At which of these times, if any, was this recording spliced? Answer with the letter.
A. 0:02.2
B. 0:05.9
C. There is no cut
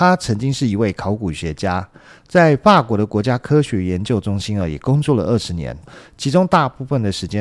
B